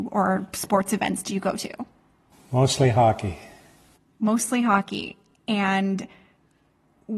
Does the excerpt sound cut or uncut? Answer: uncut